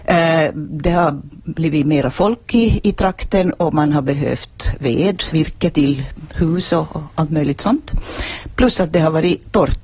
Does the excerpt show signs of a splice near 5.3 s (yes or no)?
yes